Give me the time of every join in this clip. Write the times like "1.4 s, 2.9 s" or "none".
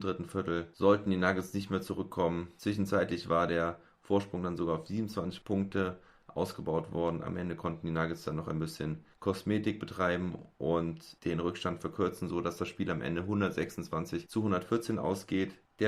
9.1 s